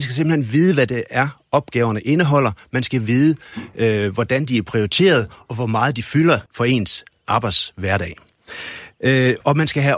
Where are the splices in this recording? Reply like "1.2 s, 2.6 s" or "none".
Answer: 6.5 s